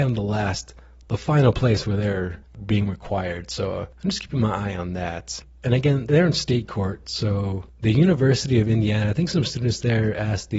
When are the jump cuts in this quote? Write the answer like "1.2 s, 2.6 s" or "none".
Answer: none